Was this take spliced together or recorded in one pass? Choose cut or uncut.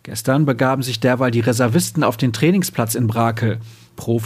uncut